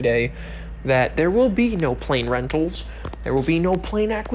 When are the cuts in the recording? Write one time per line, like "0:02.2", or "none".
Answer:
none

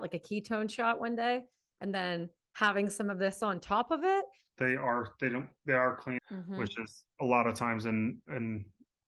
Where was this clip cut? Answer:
0:04.5
0:06.2

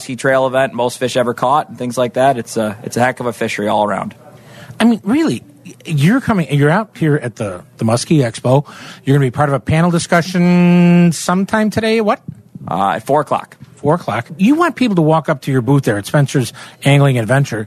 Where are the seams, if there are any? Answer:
none

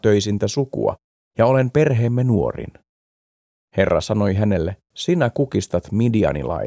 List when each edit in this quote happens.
0:04.9

